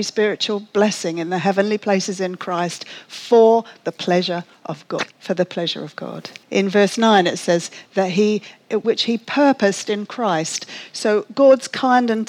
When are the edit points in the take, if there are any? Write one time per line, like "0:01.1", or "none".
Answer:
0:05.1
0:06.4
0:08.8